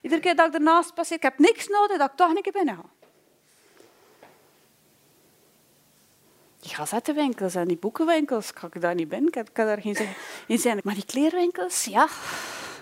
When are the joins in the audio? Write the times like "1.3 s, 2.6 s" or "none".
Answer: 10.8 s